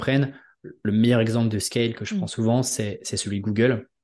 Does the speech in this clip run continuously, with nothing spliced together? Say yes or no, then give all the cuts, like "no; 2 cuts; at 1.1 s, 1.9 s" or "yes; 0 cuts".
yes; 0 cuts